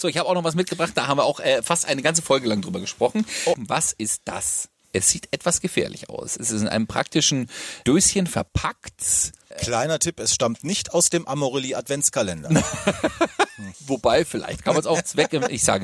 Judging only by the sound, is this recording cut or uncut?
uncut